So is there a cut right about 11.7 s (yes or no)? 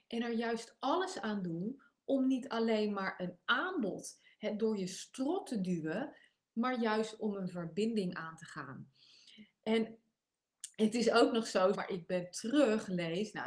yes